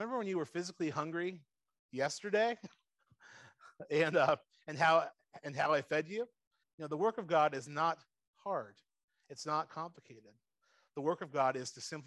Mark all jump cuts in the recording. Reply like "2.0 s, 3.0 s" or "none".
6.6 s

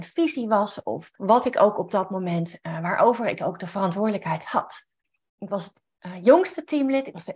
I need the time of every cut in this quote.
1.2 s, 5.3 s

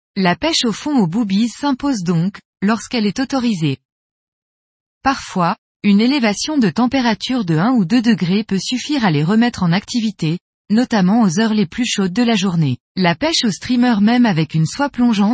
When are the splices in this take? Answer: 4.9 s, 12.8 s

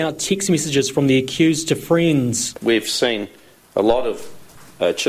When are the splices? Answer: 2.5 s

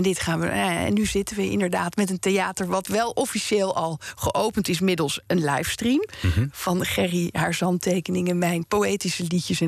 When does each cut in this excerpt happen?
none

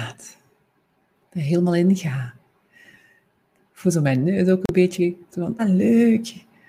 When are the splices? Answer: 5.6 s

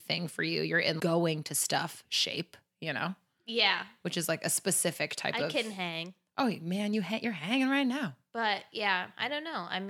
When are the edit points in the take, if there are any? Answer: 1.0 s

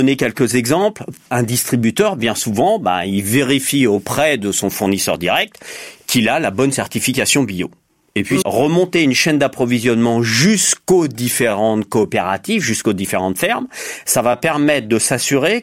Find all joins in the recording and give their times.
1.3 s, 8.4 s

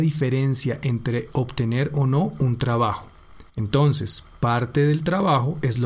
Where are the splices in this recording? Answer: 3.5 s

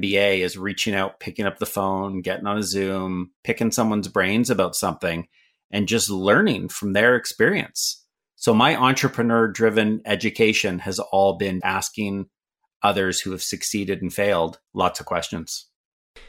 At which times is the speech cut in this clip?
11.6 s, 14.7 s

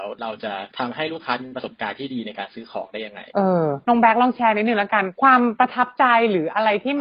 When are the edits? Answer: none

